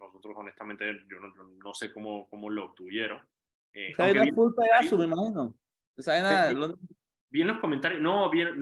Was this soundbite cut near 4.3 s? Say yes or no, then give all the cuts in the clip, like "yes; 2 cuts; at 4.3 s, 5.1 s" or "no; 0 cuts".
no; 0 cuts